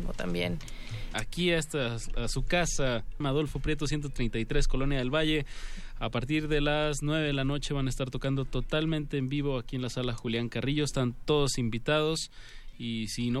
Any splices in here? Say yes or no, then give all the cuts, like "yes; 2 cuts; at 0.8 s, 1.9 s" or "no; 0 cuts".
yes; 2 cuts; at 1.1 s, 3.2 s